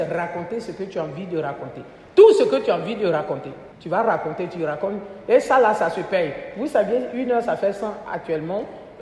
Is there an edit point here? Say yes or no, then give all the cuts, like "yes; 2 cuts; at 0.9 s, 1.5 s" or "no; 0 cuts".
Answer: yes; 1 cut; at 3.7 s